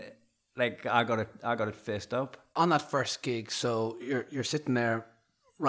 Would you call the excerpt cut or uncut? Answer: cut